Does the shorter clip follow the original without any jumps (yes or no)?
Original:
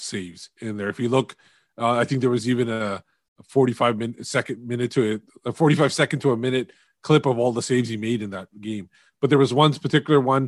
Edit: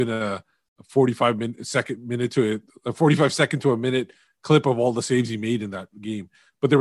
yes